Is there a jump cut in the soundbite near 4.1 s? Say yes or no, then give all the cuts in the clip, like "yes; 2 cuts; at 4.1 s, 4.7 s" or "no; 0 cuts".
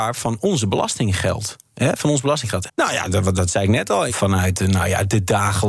yes; 2 cuts; at 2.7 s, 4.1 s